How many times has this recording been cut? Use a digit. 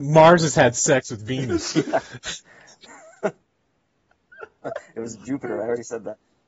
1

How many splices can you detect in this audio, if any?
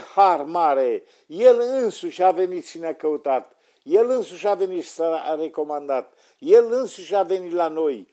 0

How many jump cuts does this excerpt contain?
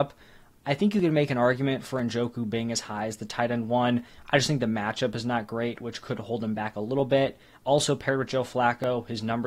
1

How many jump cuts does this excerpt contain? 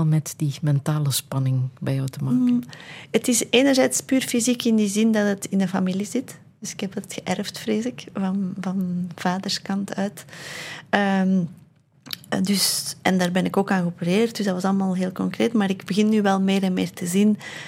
0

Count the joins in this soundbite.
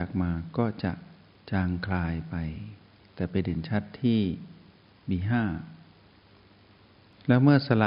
0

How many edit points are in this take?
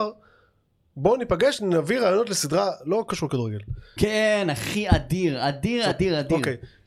2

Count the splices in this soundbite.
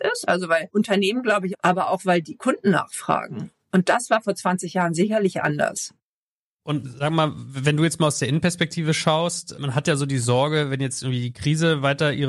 1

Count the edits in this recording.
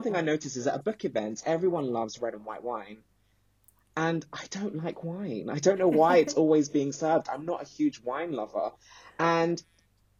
0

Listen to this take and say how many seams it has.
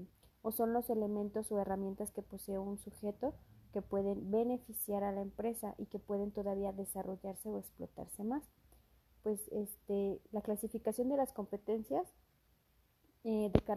0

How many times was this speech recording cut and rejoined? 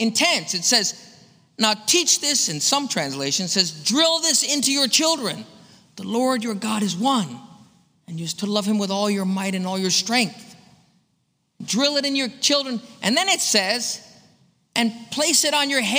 0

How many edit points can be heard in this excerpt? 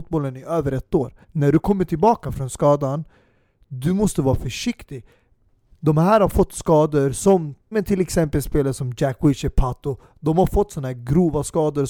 3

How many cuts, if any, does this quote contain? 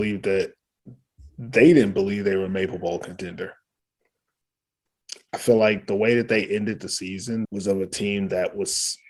1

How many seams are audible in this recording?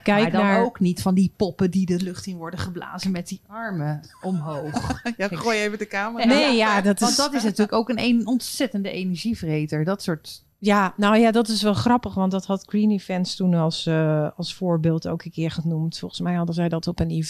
0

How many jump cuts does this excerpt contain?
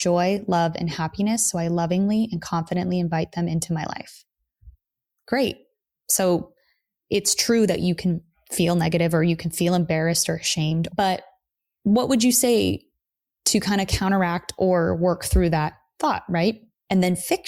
0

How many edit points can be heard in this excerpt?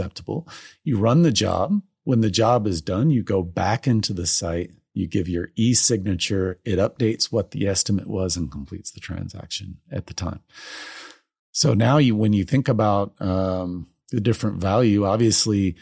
0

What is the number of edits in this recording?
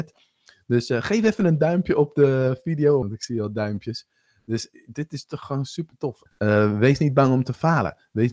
2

